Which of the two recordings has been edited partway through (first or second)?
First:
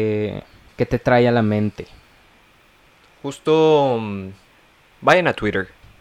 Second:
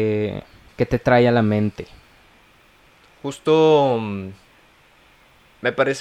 first